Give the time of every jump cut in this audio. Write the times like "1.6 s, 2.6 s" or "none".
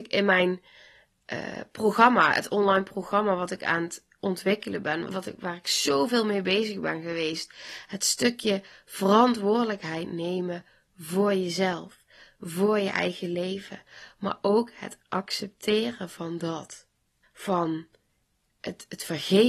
5.1 s, 17.2 s